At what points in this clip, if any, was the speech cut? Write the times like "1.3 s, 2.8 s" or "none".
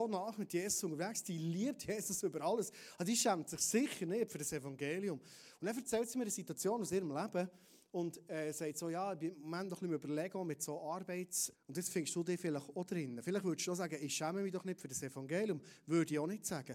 11.5 s